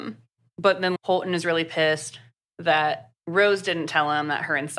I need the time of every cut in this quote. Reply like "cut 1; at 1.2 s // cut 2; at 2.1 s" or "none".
cut 1; at 1.0 s // cut 2; at 3.2 s